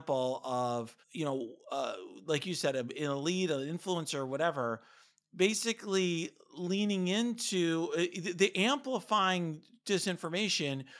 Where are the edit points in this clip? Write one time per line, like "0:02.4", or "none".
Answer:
0:01.0